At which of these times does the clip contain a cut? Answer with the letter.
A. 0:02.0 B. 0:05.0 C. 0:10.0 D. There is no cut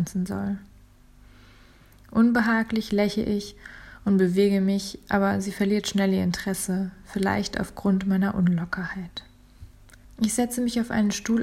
C